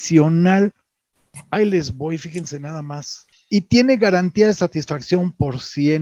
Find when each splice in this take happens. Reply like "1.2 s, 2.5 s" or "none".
3.3 s